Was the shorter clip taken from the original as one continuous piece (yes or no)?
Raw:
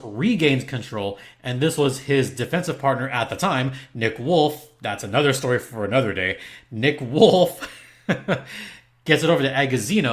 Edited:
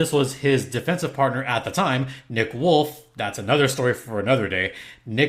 yes